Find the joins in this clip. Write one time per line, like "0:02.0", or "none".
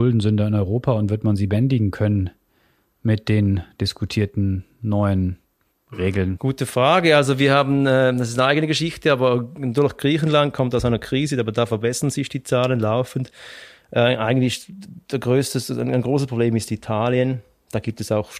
0:06.3